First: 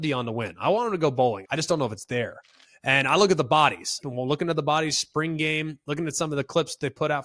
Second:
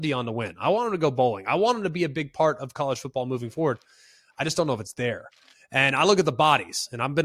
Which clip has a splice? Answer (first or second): first